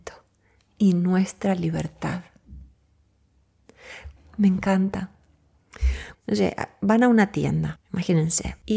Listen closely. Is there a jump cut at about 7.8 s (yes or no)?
no